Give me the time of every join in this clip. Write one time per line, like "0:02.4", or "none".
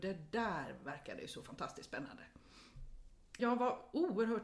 0:03.4